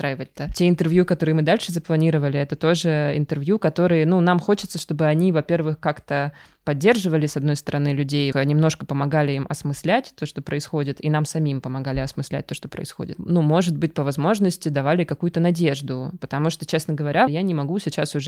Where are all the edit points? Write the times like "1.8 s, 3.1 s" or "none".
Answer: 8.3 s, 17.3 s